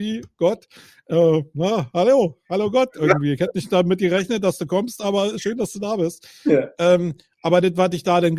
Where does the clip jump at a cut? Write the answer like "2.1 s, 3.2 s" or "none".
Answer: none